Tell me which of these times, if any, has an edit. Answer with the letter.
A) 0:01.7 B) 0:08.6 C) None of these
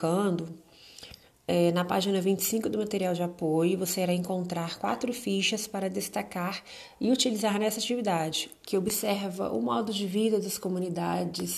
B